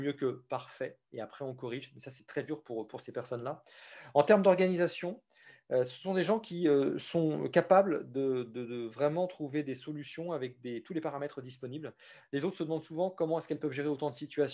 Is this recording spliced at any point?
no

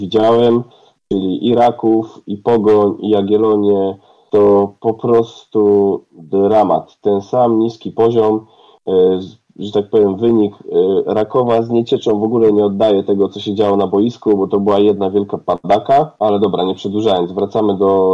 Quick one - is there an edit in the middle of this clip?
yes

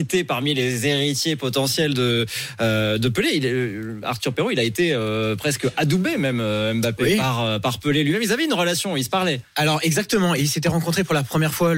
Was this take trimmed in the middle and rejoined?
no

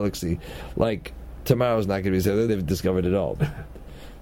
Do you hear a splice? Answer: yes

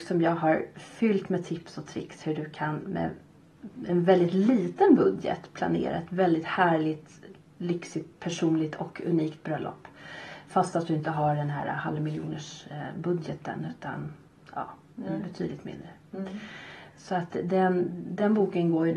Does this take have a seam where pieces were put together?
no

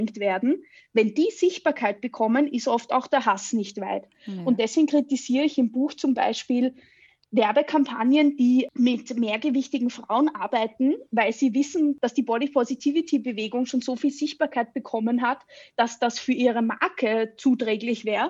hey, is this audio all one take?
yes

